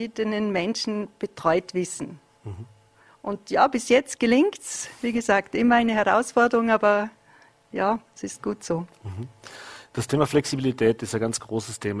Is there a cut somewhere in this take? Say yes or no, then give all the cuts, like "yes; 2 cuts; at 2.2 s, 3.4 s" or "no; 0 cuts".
no; 0 cuts